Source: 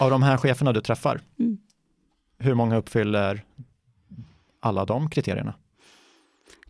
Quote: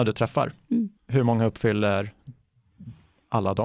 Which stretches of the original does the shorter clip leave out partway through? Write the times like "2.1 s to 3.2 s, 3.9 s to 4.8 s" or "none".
1.6 s to 2.3 s